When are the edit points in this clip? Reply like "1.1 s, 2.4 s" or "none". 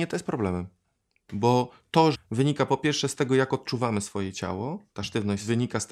2.1 s